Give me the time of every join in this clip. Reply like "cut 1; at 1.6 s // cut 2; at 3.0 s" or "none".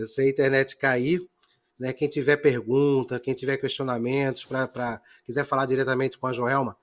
cut 1; at 1.7 s